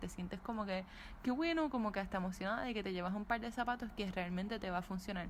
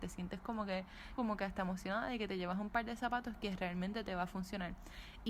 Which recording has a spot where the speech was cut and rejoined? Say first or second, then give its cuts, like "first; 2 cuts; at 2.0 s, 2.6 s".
second; 1 cut; at 1.2 s